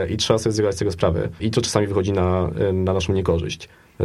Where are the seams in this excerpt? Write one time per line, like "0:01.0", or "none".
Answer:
0:01.4